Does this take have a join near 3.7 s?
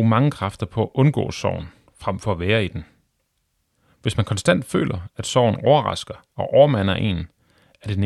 no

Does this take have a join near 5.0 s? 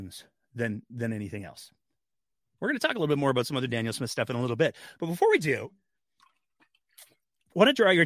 no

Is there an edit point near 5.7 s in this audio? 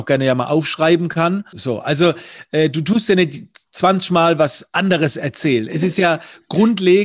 no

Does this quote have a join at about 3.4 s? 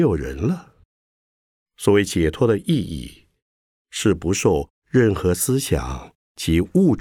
no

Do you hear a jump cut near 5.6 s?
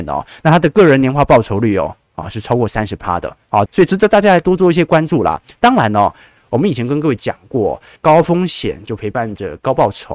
no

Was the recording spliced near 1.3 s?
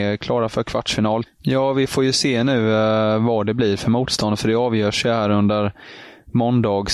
yes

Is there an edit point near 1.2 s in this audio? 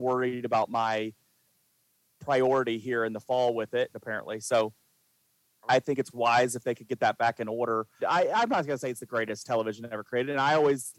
no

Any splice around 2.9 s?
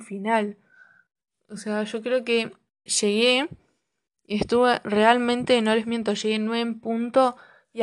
yes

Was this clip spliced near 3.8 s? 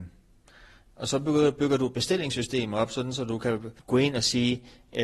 yes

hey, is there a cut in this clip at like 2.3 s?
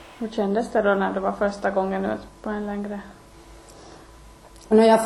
yes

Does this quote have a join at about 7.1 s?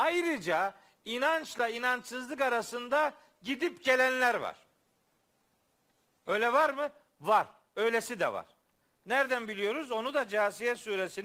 no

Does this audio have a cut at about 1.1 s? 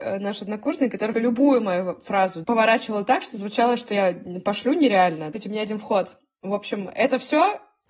yes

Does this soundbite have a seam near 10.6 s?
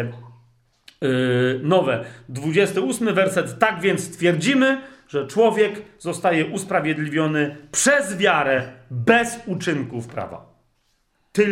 no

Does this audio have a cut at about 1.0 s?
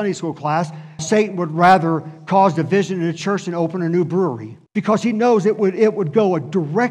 yes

